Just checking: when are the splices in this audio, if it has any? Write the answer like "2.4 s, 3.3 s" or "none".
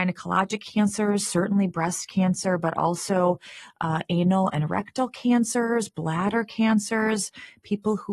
none

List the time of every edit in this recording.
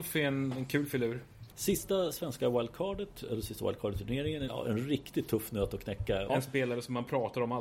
1.5 s, 4.5 s, 6.3 s

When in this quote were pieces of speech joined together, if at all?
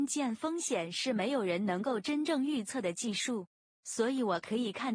none

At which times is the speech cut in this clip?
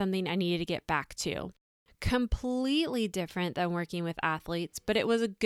1.9 s

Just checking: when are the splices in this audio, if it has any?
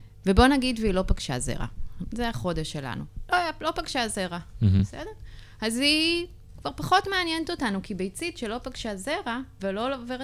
none

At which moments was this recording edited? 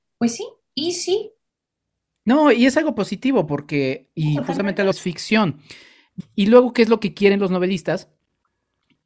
4.9 s, 6.2 s

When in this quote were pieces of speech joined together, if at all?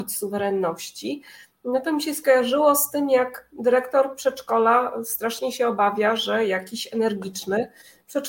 none

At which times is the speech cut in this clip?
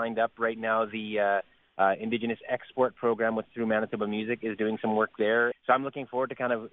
5.5 s

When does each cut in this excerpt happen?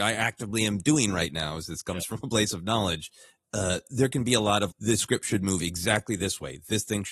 3.4 s, 4.7 s

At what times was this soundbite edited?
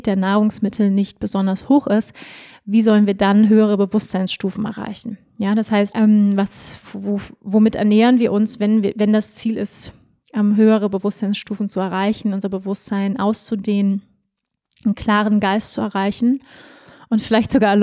5.9 s

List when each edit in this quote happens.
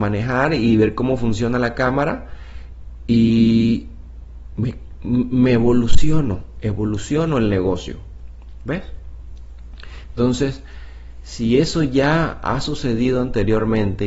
none

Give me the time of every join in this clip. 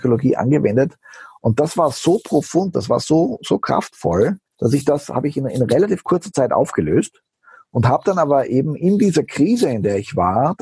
none

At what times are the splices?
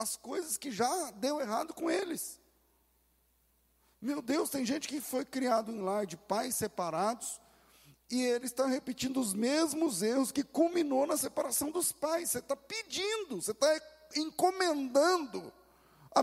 none

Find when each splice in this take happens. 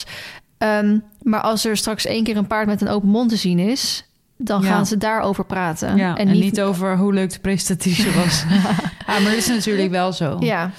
none

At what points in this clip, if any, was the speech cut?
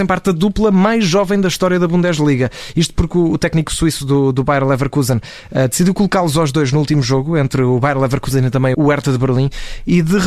8.7 s

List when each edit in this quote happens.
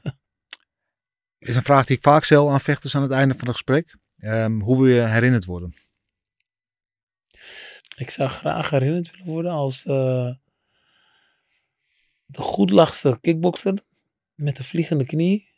7.8 s

